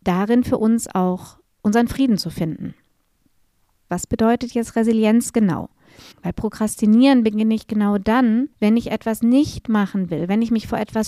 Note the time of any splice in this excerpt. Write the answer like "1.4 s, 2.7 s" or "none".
3.9 s, 6.1 s, 8.5 s